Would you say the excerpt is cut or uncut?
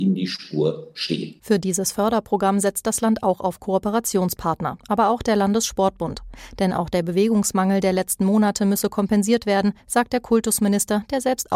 cut